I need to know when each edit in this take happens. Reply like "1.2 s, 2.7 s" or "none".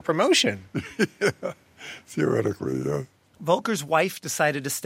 none